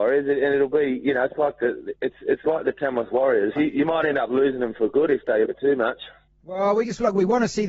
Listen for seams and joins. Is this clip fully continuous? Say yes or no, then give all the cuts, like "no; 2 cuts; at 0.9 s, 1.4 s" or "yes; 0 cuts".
no; 2 cuts; at 3.6 s, 5.5 s